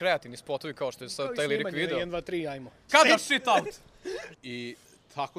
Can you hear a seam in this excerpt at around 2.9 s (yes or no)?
yes